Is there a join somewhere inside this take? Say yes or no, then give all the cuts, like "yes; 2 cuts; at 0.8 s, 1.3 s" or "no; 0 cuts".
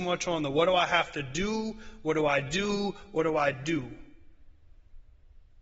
no; 0 cuts